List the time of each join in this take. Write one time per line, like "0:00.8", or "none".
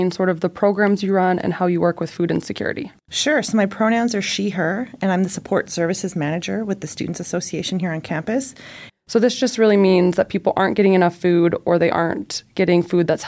0:03.0
0:08.9